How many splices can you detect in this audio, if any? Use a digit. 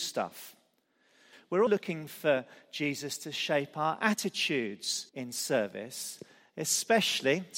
2